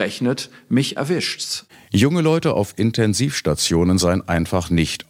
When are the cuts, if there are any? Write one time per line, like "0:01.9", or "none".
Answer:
none